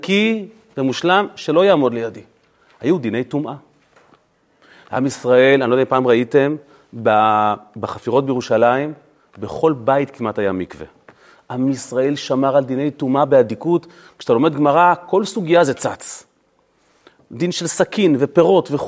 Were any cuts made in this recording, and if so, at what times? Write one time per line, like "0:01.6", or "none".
none